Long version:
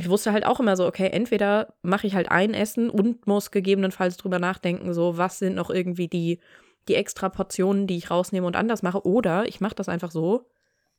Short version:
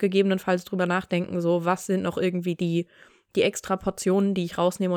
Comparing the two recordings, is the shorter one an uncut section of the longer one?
yes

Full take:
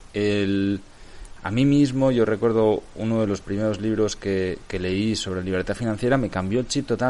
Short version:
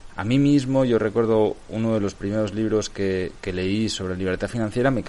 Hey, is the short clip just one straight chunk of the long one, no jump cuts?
yes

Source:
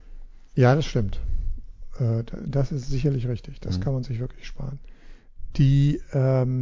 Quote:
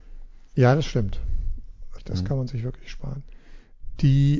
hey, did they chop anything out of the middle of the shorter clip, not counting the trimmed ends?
yes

